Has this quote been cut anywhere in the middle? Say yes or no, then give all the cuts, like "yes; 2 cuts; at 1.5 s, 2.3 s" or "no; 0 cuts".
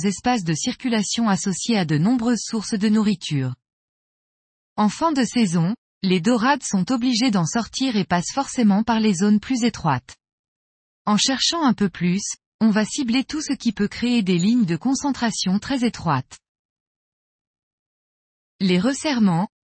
no; 0 cuts